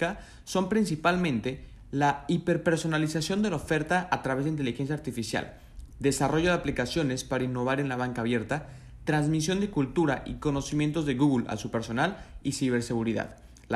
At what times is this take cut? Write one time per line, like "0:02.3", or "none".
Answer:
none